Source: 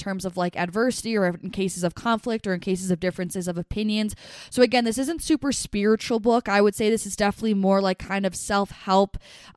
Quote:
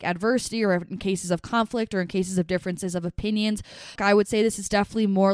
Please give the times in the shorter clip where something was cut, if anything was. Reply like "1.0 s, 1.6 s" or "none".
4.0 s